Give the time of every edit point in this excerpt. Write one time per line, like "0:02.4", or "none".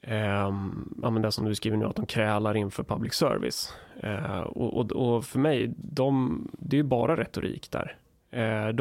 none